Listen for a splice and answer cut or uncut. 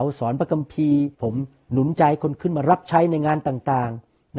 cut